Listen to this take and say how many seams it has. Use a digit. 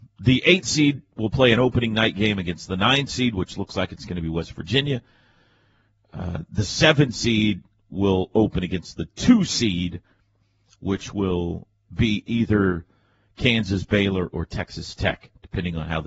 0